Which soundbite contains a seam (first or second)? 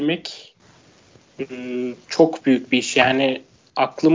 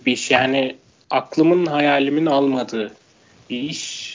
first